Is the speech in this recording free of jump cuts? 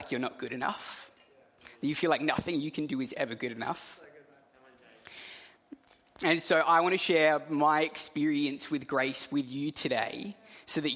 yes; 0 cuts

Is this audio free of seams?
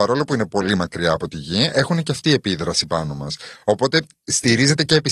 yes; 0 cuts

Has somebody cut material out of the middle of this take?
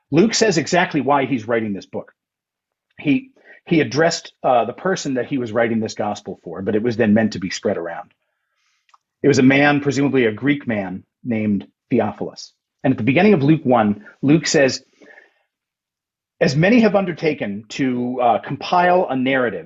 no; 0 cuts

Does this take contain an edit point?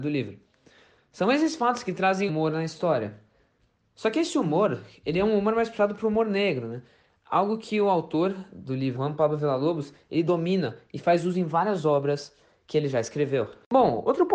yes; 2 cuts; at 2.3 s, 9.0 s

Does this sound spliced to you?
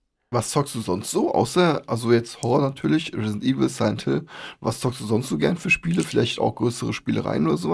no; 0 cuts

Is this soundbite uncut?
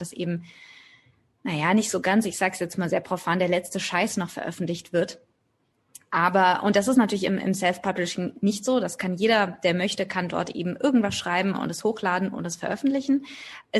yes; 0 cuts

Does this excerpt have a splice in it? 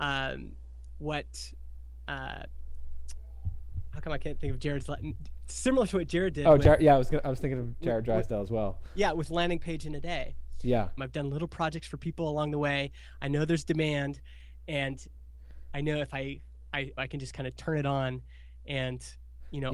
yes; 2 cuts; at 11.0 s, 17.0 s

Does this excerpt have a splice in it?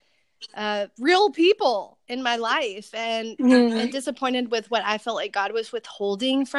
no; 0 cuts

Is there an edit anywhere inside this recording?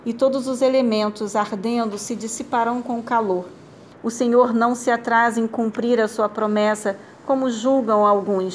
yes; 1 cut; at 3.9 s

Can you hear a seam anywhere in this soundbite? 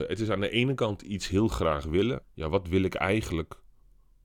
yes; 1 cut; at 2.2 s

